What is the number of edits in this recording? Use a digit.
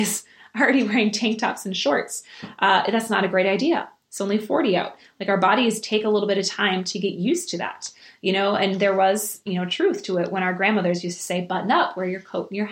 0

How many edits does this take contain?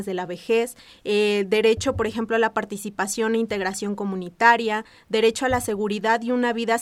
0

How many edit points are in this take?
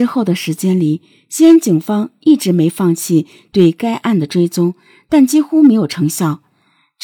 0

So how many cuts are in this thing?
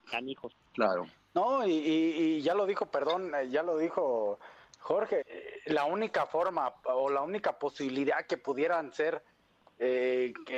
1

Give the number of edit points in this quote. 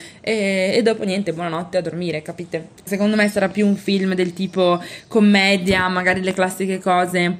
1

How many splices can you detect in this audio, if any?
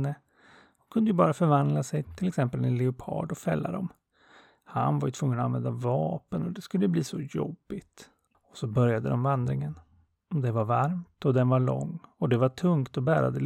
2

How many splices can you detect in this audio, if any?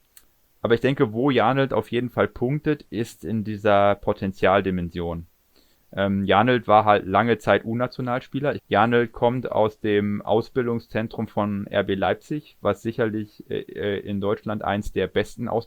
1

